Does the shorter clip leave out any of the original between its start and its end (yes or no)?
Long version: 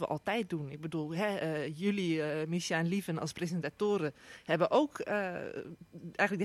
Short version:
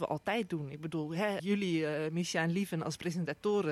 yes